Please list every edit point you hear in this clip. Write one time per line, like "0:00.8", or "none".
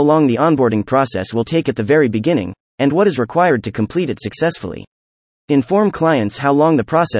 0:02.7
0:05.3